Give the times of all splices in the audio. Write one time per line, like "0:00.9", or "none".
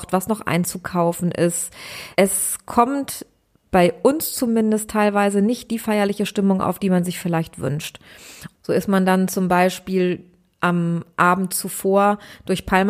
0:02.1
0:08.5